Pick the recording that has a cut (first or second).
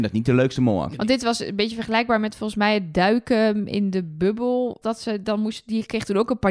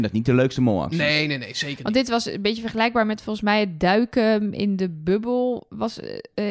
first